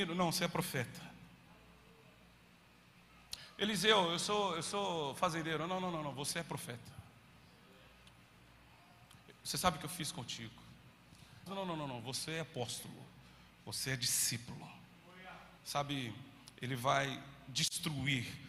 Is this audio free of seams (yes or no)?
no